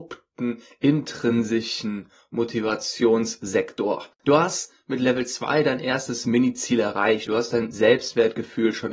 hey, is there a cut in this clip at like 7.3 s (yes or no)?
yes